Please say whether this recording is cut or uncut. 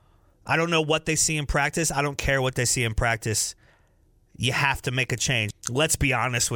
cut